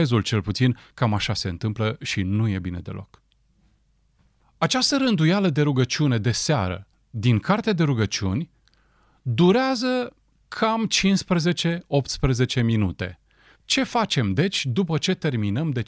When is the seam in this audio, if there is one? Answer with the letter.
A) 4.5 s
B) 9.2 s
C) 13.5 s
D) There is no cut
C